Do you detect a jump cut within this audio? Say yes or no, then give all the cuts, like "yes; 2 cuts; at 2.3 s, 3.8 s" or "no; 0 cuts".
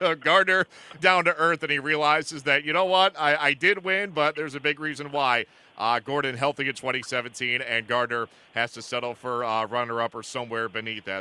yes; 1 cut; at 1.0 s